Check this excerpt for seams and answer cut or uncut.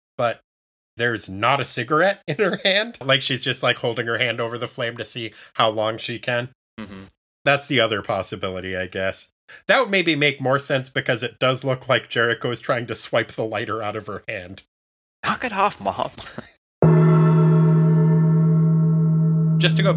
cut